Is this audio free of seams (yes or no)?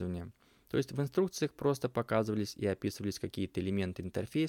yes